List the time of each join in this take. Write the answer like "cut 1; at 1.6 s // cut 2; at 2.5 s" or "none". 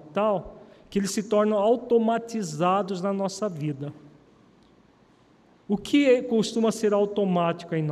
none